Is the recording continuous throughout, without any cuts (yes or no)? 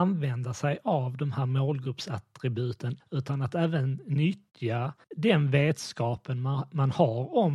no